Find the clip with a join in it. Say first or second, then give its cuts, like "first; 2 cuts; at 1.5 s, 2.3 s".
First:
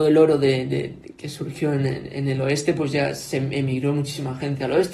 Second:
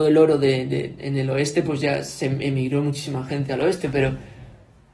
second; 1 cut; at 1.0 s